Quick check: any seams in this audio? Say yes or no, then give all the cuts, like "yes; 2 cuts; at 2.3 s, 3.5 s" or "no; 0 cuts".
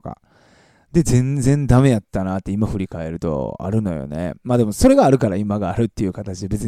no; 0 cuts